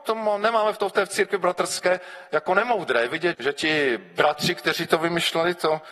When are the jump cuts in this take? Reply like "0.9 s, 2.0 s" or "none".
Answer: 3.3 s